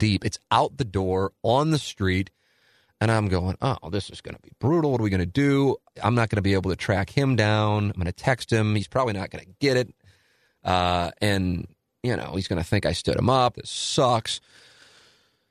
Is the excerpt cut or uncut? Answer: cut